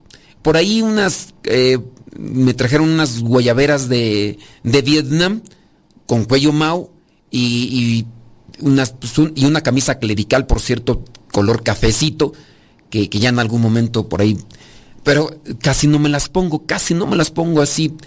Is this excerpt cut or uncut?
uncut